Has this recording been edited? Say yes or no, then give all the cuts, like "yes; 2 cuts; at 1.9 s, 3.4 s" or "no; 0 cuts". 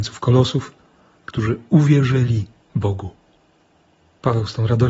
yes; 1 cut; at 1.2 s